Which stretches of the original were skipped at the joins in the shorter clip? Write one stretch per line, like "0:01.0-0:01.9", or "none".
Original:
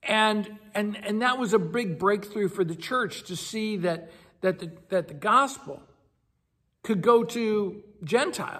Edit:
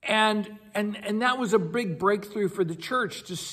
none